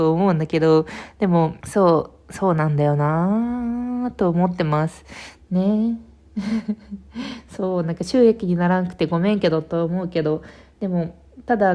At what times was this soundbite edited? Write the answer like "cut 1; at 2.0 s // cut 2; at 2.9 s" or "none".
cut 1; at 1.6 s // cut 2; at 5.4 s